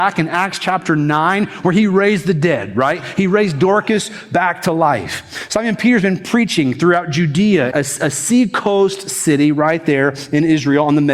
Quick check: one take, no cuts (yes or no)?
no